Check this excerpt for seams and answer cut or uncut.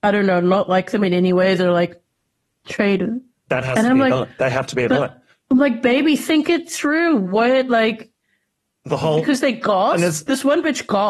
uncut